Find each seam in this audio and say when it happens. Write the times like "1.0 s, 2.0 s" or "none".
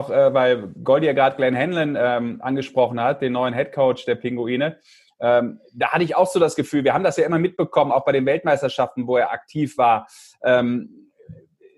none